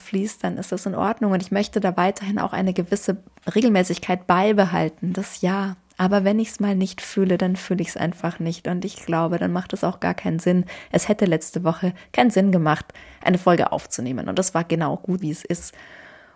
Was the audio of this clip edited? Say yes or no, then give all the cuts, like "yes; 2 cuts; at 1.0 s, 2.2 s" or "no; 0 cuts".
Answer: yes; 1 cut; at 15.2 s